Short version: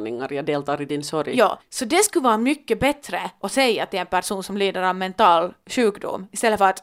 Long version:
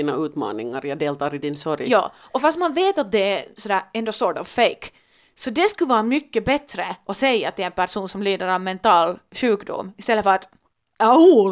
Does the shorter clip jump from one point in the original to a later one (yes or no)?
yes